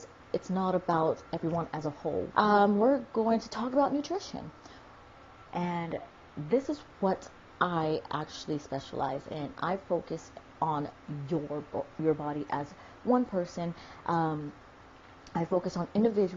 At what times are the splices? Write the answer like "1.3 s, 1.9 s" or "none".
2.3 s, 5.5 s